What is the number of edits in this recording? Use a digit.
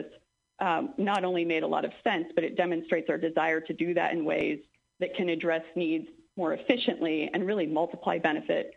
0